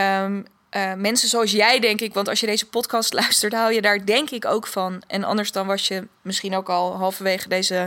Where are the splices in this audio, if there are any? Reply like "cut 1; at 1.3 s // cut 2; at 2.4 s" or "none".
none